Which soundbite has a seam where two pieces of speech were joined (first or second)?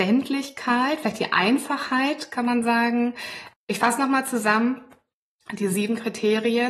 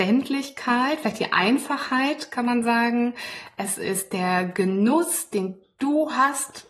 first